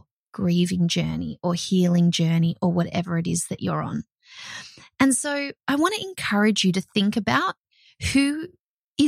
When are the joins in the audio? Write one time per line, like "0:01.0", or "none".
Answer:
none